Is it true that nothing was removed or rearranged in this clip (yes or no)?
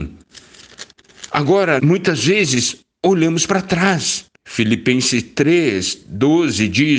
no